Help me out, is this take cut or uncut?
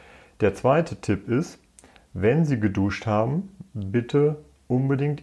uncut